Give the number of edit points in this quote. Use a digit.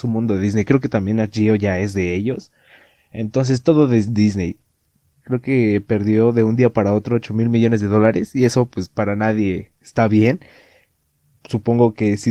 1